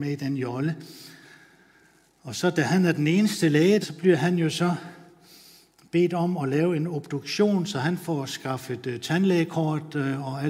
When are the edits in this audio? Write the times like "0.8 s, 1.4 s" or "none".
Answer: 3.8 s